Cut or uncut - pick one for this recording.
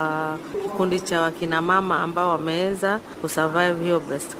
uncut